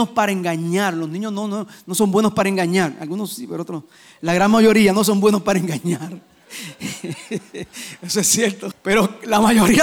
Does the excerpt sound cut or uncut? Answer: cut